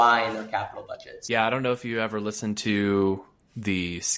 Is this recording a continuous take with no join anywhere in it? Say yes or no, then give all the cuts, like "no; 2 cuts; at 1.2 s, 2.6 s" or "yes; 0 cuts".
yes; 0 cuts